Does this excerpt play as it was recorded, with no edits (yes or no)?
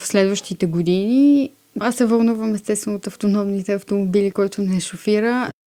no